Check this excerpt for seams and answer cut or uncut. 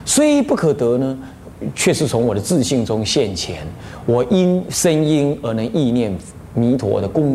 uncut